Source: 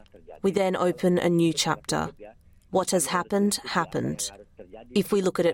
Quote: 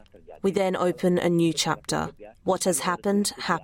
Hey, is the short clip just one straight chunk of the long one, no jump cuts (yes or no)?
no